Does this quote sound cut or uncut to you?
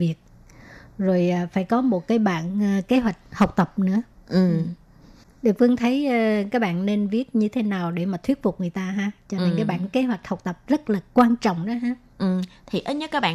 uncut